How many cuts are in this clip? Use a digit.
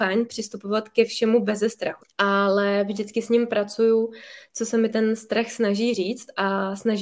1